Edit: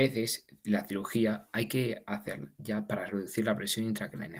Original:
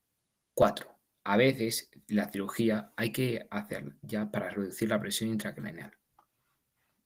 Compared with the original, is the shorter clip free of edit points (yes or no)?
yes